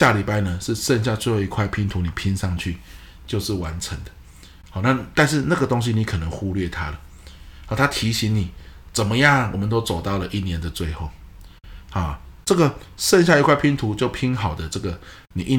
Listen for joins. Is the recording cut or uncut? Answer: uncut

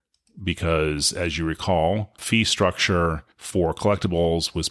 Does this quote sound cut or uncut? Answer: cut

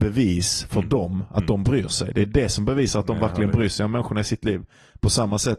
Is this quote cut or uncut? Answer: uncut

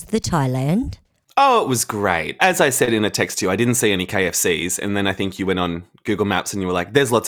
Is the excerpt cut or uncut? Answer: uncut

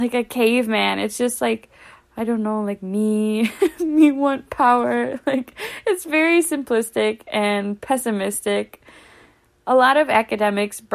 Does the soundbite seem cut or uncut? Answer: uncut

